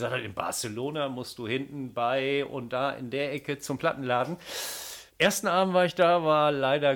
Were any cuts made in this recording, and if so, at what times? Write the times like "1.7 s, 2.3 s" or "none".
5.1 s